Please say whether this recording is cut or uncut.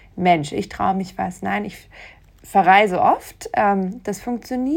uncut